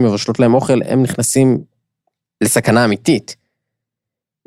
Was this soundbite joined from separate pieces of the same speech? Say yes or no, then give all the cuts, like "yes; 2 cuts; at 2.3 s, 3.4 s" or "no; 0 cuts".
no; 0 cuts